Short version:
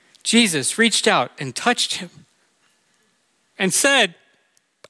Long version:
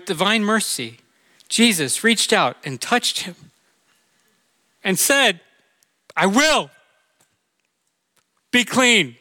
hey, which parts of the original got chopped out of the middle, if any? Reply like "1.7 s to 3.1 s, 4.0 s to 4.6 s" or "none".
none